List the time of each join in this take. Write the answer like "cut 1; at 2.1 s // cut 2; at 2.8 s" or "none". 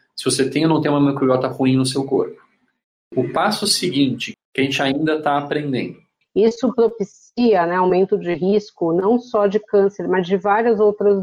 cut 1; at 4.3 s // cut 2; at 6.2 s